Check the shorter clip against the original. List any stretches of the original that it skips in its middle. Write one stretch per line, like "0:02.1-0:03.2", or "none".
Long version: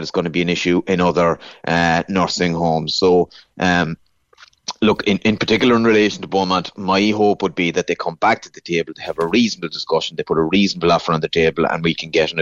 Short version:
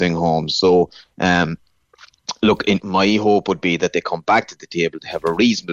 0:05.2-0:06.7